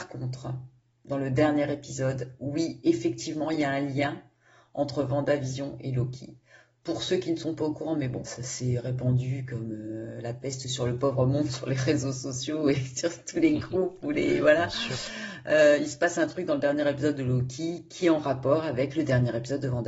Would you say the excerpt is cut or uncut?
cut